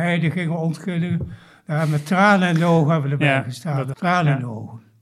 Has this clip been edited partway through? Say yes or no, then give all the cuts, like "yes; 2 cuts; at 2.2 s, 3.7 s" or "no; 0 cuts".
yes; 1 cut; at 3.9 s